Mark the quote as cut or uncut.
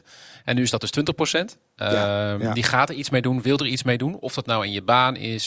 uncut